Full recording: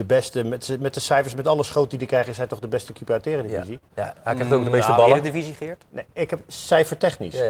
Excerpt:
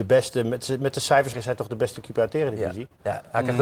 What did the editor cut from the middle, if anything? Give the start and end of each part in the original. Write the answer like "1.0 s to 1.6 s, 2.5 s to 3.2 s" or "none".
1.3 s to 2.2 s